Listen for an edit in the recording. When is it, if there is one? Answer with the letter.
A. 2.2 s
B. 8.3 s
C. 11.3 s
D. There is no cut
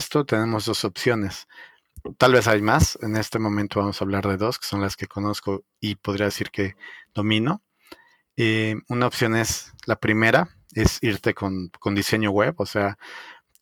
D